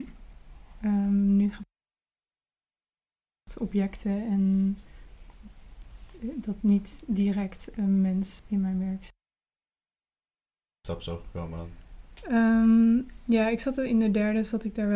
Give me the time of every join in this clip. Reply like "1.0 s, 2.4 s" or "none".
8.4 s